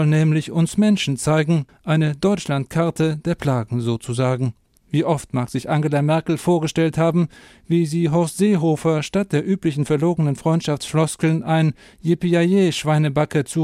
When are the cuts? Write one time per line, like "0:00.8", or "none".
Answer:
0:01.7
0:04.8